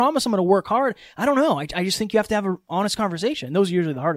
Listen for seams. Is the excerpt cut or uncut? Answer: uncut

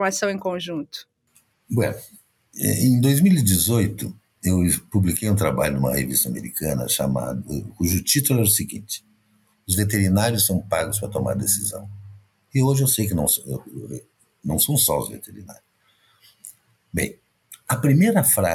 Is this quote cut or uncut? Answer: uncut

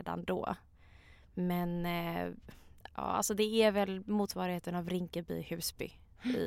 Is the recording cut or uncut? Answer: uncut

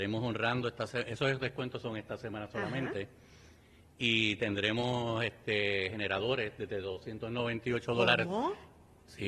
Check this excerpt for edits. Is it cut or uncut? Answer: uncut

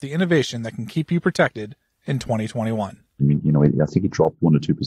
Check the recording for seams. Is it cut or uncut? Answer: cut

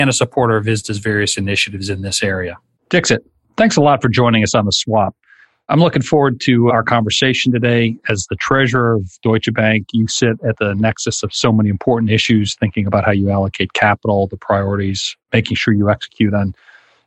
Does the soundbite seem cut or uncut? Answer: cut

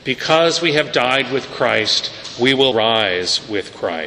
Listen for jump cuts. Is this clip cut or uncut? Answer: cut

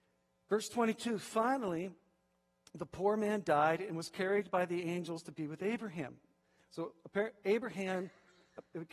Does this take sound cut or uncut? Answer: uncut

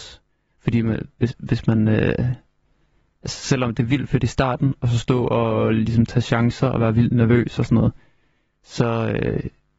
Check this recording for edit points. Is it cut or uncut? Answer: uncut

